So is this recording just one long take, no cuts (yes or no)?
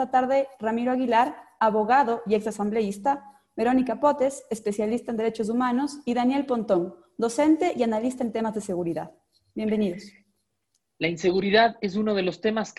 yes